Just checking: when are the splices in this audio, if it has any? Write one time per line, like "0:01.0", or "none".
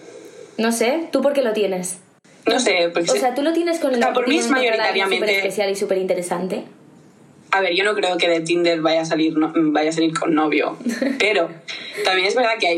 none